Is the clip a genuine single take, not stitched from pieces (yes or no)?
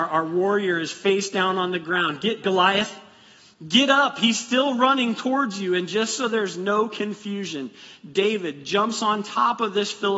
no